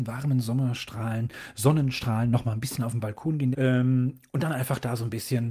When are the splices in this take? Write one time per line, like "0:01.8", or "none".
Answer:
0:03.5